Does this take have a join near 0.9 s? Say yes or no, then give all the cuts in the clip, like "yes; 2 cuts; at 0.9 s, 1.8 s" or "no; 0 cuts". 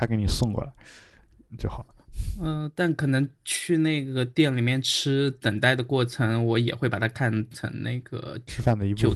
no; 0 cuts